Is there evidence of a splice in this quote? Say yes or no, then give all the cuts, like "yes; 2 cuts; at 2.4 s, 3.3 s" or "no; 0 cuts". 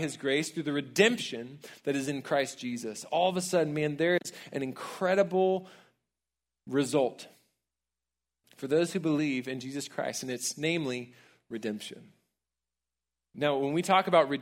no; 0 cuts